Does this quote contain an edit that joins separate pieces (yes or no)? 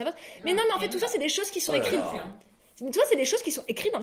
no